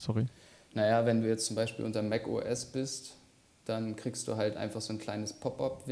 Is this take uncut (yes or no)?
yes